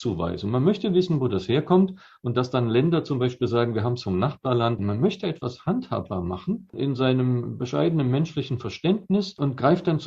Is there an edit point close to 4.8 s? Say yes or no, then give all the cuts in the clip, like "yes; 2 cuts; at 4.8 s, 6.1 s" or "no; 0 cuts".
yes; 1 cut; at 4.8 s